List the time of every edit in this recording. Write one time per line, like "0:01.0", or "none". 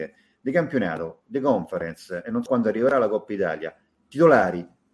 0:02.5